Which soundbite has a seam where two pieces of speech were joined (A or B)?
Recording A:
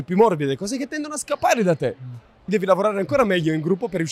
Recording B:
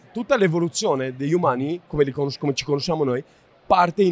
A